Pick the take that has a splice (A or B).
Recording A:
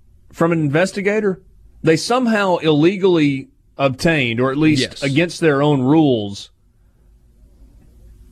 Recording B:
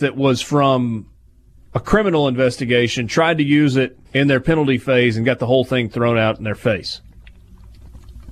B